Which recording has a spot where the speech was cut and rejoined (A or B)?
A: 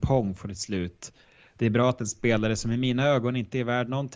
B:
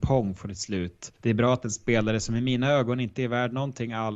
B